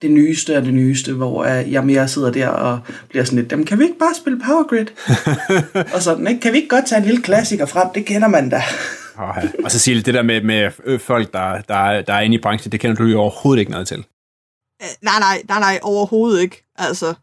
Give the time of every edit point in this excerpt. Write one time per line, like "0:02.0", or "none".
none